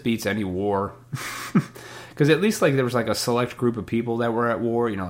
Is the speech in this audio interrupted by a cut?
no; 0 cuts

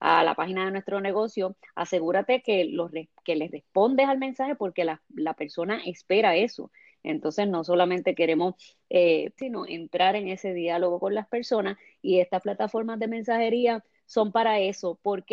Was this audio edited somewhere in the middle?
yes; 2 cuts; at 6.9 s, 9.4 s

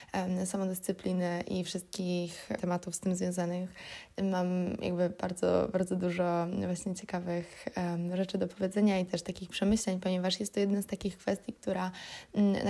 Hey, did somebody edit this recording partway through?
yes; 1 cut; at 2.6 s

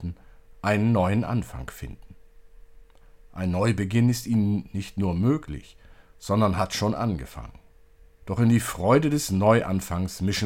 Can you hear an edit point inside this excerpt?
yes; 1 cut; at 8.2 s

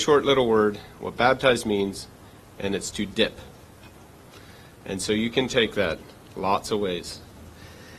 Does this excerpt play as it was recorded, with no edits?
yes; 0 cuts

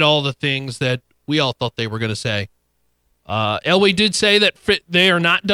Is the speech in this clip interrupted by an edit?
no; 0 cuts

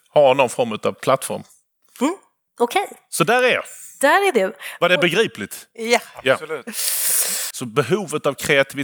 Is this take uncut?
no; 1 cut; at 7.5 s

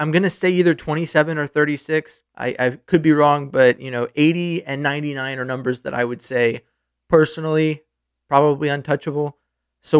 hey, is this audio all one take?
no; 1 cut; at 2.3 s

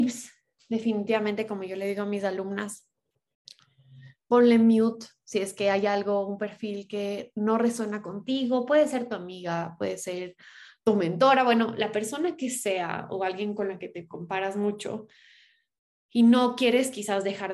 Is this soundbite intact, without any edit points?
yes; 0 cuts

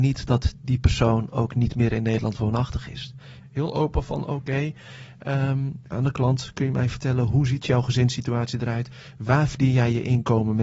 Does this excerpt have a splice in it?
yes; 2 cuts; at 3.4 s, 5.9 s

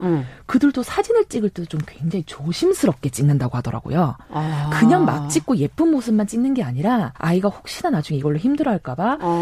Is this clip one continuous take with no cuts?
no; 1 cut; at 7.2 s

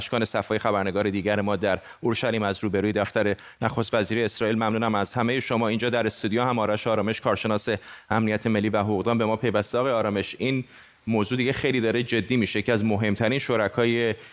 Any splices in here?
no; 0 cuts

